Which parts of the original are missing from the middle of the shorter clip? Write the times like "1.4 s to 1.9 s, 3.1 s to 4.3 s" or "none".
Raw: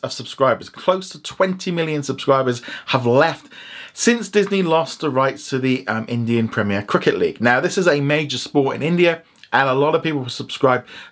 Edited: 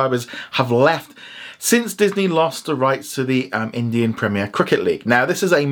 none